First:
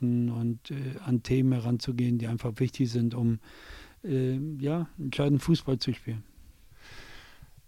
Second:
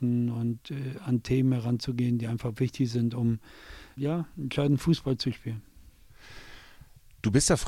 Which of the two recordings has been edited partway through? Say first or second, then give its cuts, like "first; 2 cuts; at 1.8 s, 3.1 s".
second; 1 cut; at 4.0 s